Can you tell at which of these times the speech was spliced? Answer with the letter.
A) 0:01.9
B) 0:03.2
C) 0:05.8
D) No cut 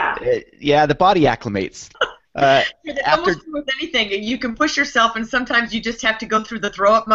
A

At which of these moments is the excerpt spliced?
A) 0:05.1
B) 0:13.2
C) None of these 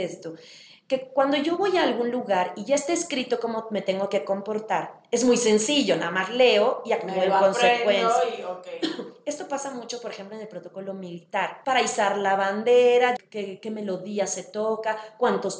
B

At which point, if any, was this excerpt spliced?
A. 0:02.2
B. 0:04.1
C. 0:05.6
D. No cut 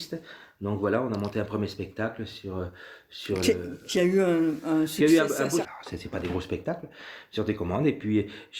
C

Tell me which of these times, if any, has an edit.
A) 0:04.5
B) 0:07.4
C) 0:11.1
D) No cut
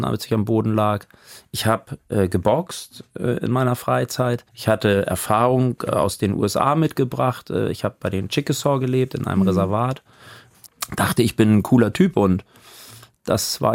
A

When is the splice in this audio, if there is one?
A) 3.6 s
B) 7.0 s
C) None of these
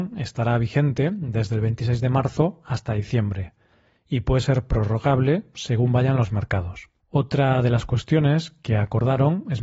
B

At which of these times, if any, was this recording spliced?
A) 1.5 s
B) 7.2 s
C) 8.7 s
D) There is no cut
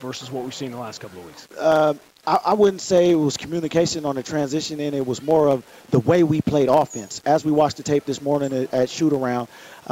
A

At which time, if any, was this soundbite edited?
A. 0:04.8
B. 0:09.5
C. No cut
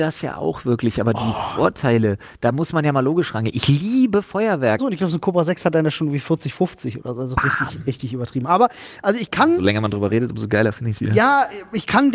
A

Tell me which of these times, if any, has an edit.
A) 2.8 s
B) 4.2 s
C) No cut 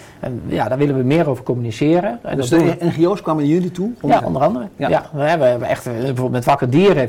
B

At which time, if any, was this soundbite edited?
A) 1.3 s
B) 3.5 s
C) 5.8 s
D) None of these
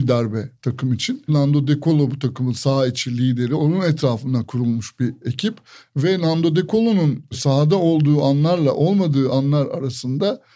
A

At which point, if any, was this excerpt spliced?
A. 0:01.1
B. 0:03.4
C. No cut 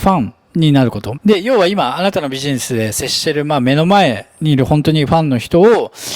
A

